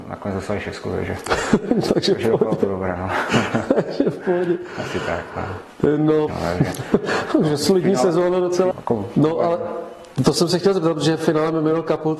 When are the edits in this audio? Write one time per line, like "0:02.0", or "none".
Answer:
0:06.3
0:08.7